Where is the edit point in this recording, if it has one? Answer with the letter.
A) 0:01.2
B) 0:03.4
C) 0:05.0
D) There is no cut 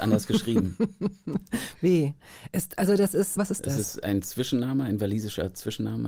B